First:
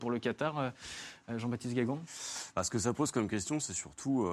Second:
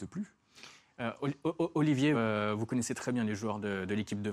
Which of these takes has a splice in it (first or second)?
second